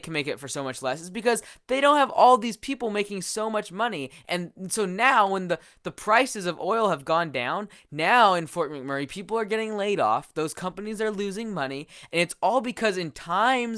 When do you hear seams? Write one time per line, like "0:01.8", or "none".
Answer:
none